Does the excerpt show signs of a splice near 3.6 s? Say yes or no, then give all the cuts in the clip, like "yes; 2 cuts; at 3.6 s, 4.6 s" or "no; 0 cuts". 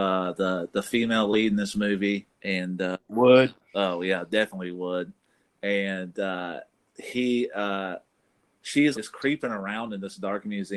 no; 2 cuts; at 2.3 s, 8.9 s